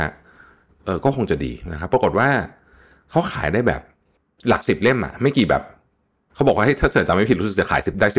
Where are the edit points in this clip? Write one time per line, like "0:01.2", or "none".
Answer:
none